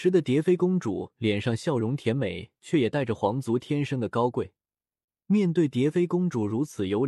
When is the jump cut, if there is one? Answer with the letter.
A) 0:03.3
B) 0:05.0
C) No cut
B